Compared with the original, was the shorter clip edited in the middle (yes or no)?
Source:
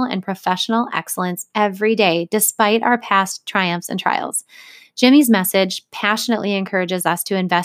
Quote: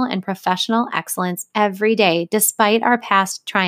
no